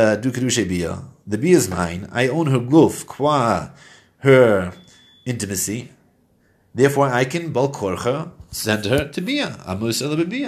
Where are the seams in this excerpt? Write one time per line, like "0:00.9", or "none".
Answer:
none